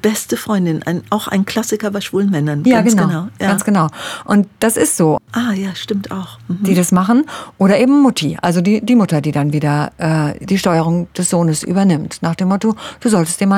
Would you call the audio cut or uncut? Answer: cut